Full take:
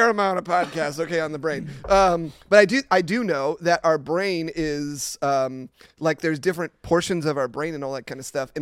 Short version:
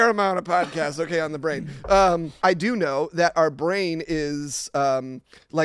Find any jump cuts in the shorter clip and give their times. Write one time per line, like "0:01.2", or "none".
0:02.4